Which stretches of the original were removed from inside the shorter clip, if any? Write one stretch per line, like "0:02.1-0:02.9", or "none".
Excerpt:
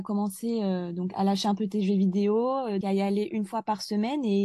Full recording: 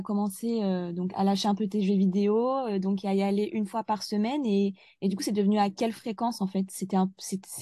0:02.8-0:03.0